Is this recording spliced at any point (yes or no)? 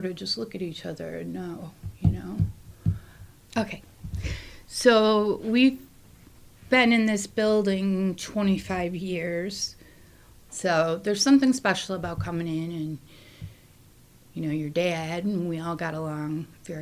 yes